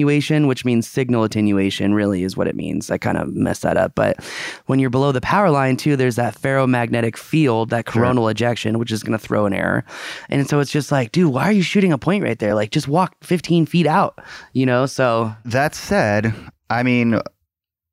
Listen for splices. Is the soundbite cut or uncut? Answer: uncut